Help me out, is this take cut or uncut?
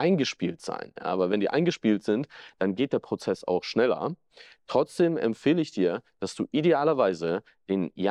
uncut